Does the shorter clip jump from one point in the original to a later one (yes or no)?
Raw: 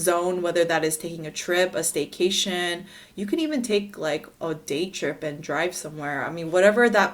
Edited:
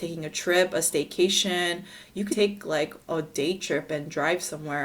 yes